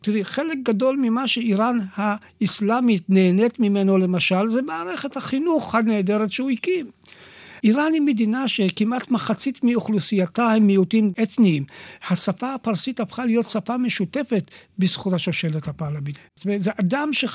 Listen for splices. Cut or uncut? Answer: cut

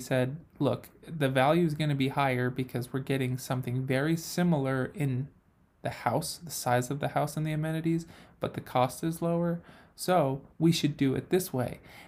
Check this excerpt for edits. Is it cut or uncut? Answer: uncut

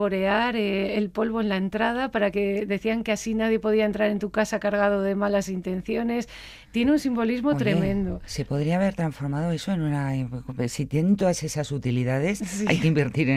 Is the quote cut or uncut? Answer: uncut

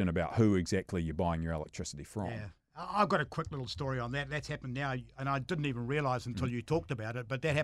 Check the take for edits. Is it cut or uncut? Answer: uncut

